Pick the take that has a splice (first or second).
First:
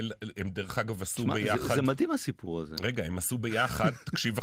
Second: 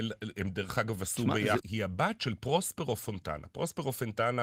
second